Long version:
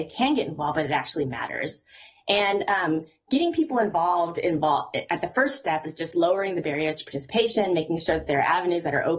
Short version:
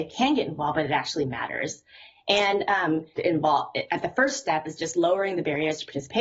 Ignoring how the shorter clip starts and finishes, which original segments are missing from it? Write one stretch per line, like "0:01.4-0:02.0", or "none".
0:03.2-0:04.3